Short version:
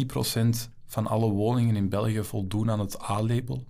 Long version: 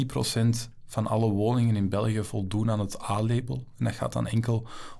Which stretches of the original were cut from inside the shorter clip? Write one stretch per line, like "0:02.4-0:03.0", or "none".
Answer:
none